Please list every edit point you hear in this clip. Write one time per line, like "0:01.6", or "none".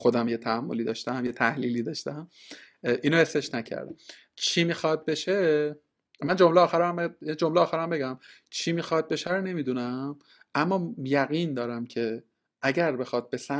none

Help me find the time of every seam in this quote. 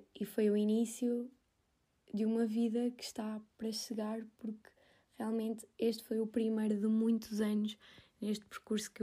none

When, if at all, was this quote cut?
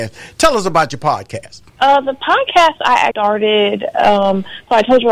0:01.7
0:03.1

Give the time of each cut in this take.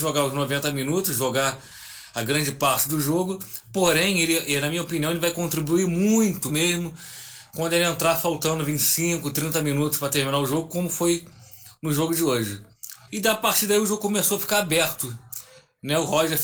0:06.5
0:13.1

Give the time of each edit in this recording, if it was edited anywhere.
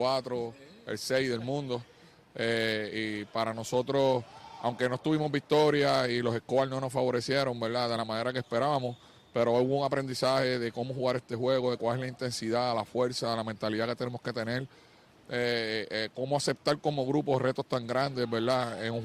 none

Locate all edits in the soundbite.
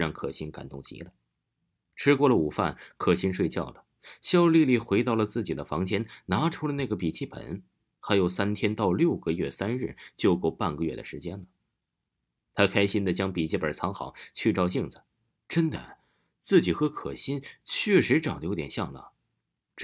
none

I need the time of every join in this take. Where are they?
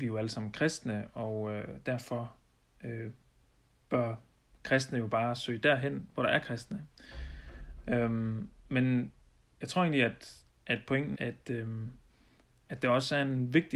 0:11.1

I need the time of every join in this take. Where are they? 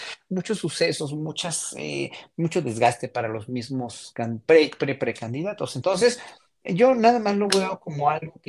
none

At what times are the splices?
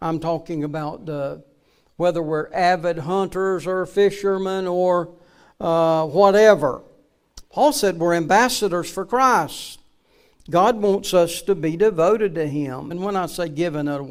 0:07.4
0:12.9

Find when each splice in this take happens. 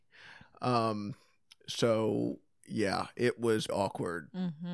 0:03.7

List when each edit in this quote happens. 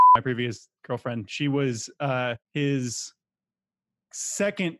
0:02.4

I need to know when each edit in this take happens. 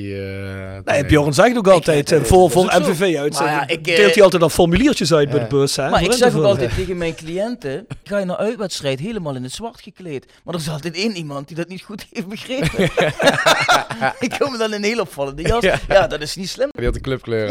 none

